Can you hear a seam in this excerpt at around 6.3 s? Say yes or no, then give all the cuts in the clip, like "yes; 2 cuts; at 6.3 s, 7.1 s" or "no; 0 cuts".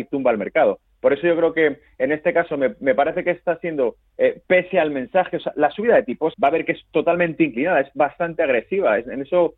yes; 1 cut; at 6.3 s